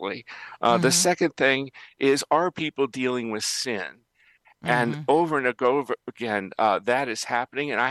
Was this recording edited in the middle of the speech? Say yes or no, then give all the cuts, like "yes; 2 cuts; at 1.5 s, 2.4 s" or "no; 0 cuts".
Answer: no; 0 cuts